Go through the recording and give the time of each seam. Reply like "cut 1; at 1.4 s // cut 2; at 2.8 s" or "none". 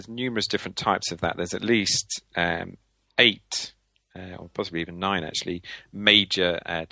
none